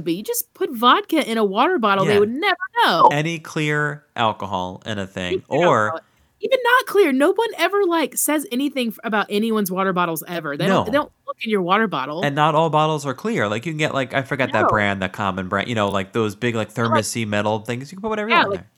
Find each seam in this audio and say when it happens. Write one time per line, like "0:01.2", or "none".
none

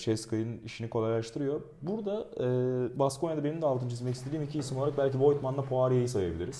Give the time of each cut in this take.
none

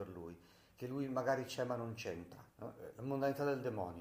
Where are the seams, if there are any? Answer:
0:02.5

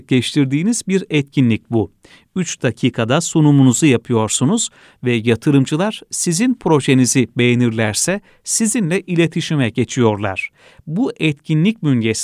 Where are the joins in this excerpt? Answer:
none

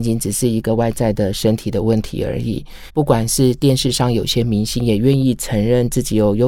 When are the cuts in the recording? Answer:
0:02.9

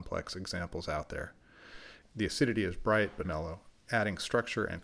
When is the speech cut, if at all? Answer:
0:02.0
0:03.2

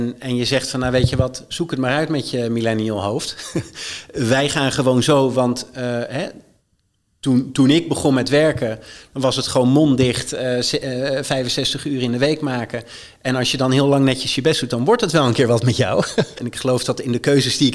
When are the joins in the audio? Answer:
0:16.4

